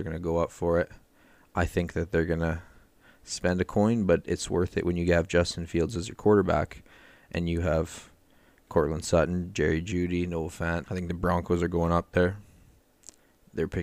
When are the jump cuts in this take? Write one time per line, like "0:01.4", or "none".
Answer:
0:10.8